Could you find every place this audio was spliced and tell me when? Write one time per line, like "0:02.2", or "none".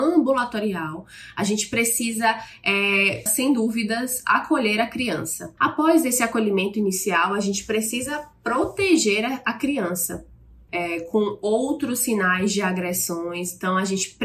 0:03.3
0:05.6
0:10.7